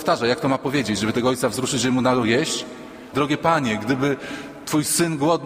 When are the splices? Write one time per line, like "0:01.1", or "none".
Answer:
0:03.1